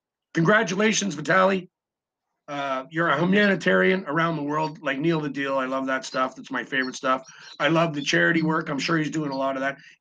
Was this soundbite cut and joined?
no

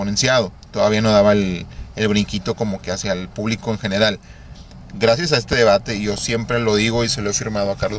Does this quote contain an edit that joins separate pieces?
no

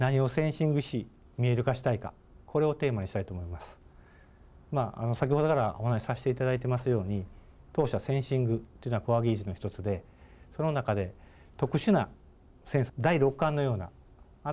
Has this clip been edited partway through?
yes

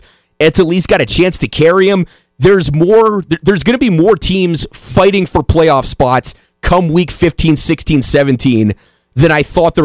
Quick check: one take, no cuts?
yes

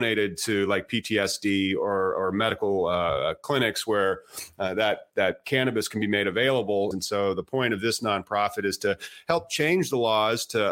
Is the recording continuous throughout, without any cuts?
no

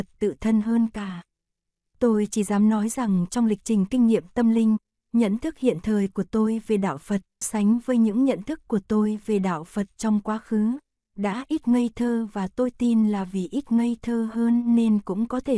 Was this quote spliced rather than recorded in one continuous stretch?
yes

